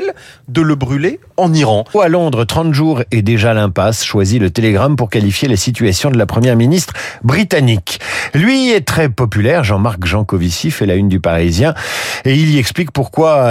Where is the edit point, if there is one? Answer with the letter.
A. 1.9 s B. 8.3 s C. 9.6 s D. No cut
A